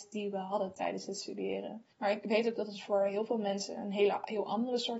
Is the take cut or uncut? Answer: cut